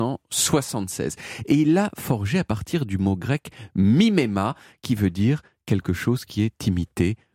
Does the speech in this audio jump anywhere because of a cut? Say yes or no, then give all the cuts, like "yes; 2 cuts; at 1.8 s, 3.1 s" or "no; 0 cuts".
no; 0 cuts